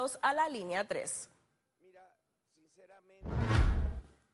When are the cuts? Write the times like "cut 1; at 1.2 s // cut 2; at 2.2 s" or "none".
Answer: none